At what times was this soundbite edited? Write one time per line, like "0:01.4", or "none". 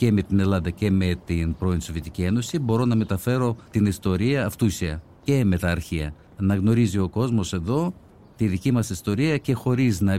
none